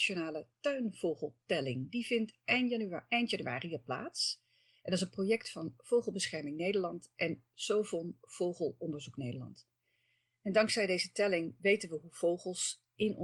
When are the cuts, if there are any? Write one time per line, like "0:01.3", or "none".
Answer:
0:11.6